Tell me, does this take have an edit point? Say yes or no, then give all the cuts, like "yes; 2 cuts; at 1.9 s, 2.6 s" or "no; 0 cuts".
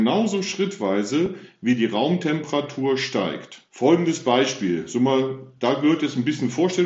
yes; 1 cut; at 3.7 s